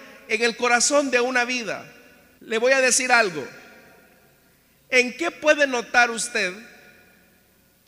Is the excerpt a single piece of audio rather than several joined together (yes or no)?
no